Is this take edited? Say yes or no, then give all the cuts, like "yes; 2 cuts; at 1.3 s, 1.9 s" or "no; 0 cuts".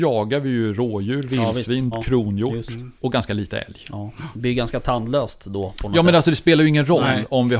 yes; 2 cuts; at 1.9 s, 3.0 s